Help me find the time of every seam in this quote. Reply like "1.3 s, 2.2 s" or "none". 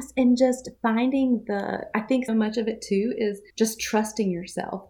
2.3 s, 3.5 s